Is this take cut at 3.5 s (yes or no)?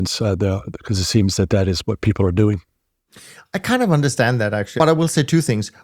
no